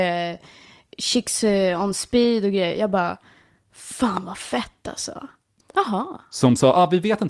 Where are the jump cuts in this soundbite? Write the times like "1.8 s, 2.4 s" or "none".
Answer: 5.6 s